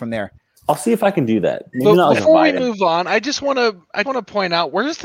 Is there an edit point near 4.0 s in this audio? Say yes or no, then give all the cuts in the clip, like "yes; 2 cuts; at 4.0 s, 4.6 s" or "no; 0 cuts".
yes; 2 cuts; at 1.7 s, 4.0 s